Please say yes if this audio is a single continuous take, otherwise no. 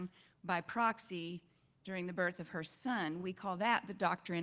yes